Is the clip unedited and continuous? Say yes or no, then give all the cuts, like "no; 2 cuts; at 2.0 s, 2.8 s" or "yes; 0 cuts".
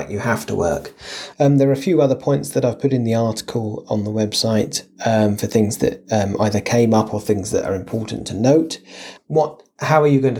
no; 2 cuts; at 1.3 s, 9.2 s